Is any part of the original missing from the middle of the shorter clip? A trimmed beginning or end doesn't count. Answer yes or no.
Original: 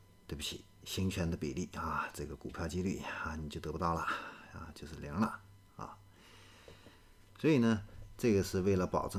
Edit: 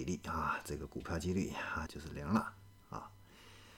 yes